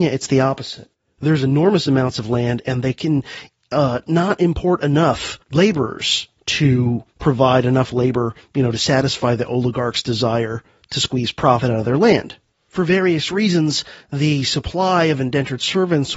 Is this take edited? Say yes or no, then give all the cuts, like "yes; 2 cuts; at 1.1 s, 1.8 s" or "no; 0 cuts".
no; 0 cuts